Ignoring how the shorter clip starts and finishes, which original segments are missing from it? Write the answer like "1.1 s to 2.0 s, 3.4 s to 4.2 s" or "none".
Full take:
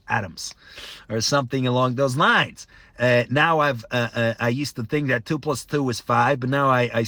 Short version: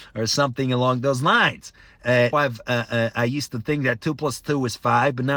3.3 s to 3.6 s